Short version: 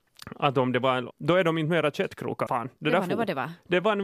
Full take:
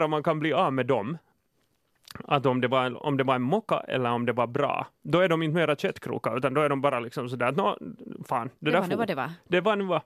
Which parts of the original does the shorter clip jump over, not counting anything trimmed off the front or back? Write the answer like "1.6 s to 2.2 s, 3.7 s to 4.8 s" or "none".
3.0 s to 5.0 s, 6.3 s to 8.3 s